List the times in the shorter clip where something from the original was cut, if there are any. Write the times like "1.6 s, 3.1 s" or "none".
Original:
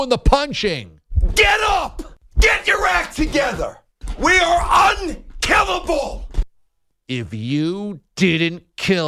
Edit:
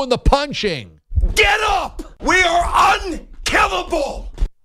2.2 s